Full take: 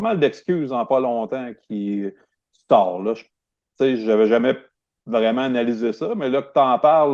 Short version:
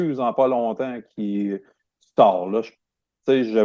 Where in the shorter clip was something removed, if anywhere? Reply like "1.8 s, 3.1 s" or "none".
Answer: none